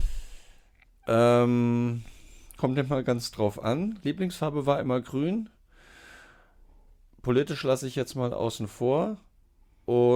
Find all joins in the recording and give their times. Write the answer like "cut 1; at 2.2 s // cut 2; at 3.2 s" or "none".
none

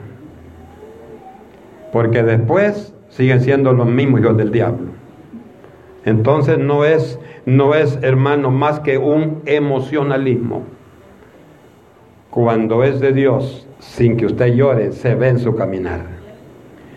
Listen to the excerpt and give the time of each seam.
cut 1; at 13.7 s

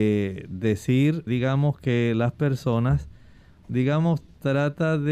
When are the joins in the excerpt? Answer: cut 1; at 1.3 s // cut 2; at 3.6 s

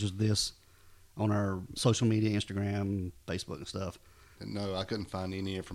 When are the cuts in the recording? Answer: cut 1; at 1.8 s // cut 2; at 4.4 s

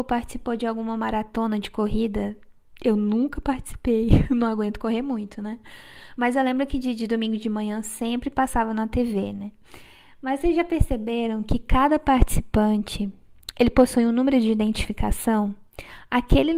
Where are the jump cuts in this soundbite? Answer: none

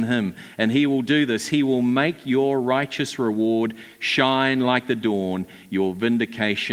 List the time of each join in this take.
none

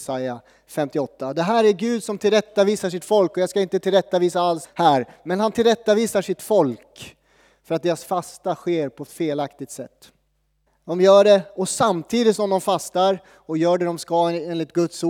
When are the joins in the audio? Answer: cut 1; at 4.6 s // cut 2; at 10.7 s

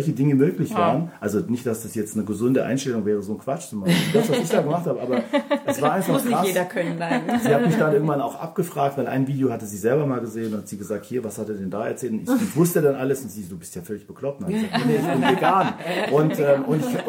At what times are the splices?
cut 1; at 16.1 s

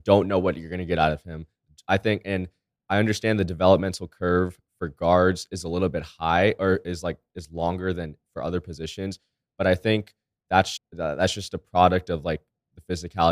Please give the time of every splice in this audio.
cut 1; at 10.8 s

